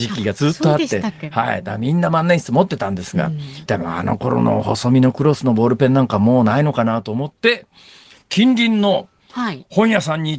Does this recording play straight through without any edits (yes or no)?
no